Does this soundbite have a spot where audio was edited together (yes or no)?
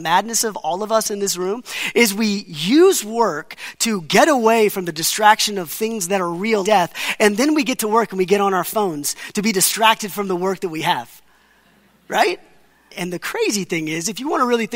yes